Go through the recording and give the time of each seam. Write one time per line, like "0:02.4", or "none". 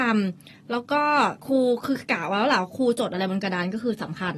0:01.4